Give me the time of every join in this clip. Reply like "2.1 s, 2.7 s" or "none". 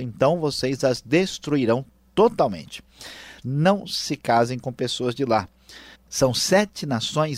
3.4 s, 5.9 s